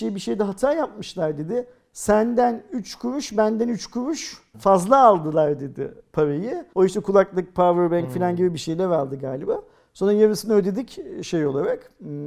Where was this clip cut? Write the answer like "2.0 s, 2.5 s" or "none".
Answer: 4.5 s, 6.7 s